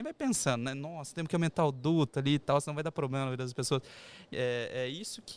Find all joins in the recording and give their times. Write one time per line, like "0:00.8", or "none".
0:04.3